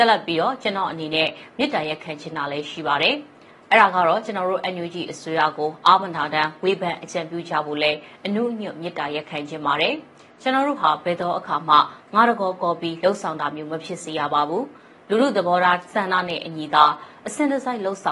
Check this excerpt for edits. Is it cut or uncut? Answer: uncut